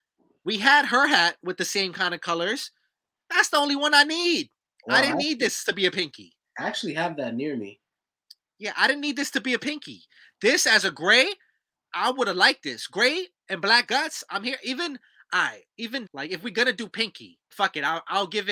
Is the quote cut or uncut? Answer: cut